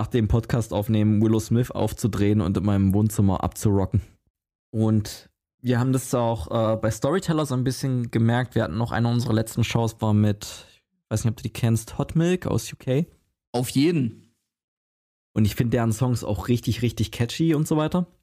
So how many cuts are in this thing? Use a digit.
0